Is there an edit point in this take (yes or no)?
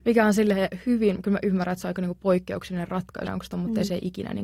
yes